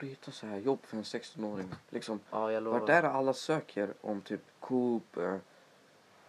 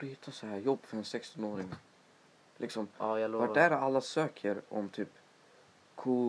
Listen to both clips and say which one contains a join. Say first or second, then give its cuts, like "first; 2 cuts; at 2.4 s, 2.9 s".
first; 2 cuts; at 1.8 s, 4.5 s